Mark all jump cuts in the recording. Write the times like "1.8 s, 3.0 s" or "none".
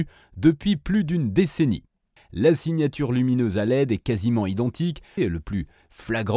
2.2 s, 5.2 s